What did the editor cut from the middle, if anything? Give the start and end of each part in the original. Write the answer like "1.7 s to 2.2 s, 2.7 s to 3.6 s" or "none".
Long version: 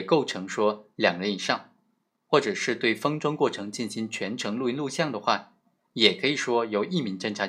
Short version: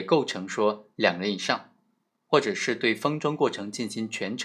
none

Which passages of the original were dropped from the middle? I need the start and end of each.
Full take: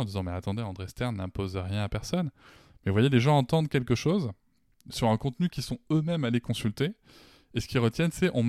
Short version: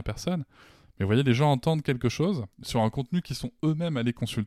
4.4 s to 4.8 s

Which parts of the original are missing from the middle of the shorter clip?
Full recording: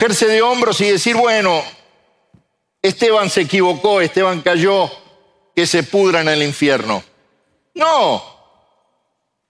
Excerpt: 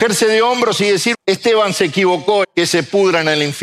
1.1 s to 2.7 s, 4.0 s to 5.4 s

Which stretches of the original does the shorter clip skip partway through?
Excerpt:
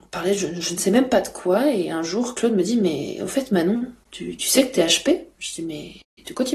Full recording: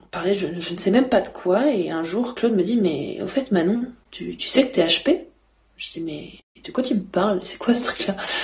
5.3 s to 5.7 s

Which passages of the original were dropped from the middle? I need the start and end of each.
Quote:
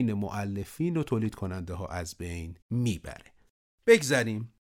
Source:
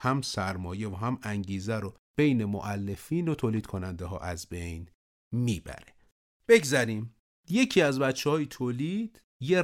4.9 s to 5.2 s

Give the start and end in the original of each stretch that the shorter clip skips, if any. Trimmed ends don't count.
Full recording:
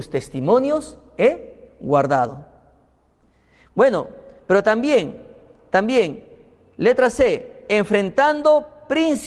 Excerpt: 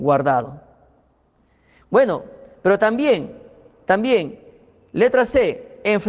none

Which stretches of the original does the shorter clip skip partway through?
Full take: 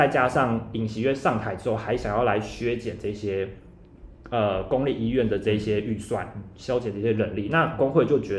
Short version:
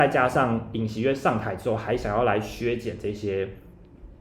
none

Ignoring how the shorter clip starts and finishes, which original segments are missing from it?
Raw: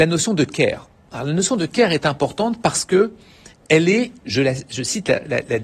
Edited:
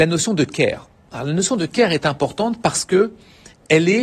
none

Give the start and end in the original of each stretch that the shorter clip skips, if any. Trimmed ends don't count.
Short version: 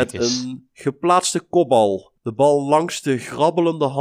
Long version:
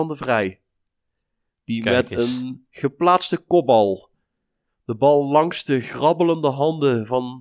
4.2 s to 4.8 s

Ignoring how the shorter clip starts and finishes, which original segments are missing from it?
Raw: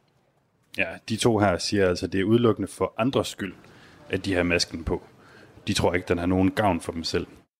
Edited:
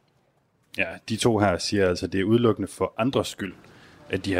none

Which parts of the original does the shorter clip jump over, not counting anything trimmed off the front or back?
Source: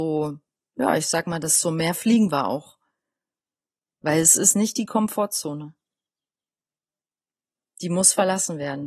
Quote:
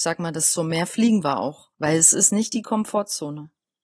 2.8 s to 3.9 s

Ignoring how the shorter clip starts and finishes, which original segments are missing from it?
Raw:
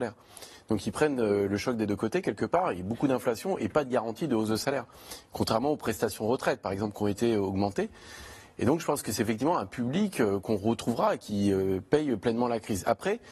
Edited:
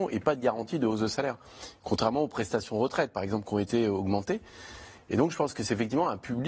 none

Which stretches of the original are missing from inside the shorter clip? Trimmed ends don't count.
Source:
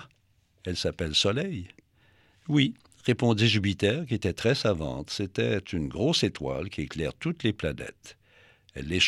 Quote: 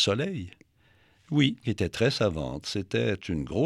2.8 s to 4.1 s

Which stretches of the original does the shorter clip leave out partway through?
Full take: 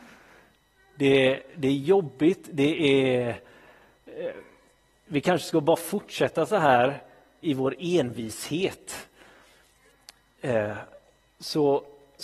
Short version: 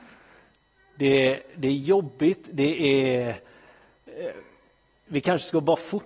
none

